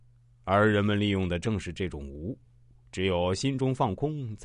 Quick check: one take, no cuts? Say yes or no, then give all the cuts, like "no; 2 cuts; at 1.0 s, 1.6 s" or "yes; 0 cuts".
yes; 0 cuts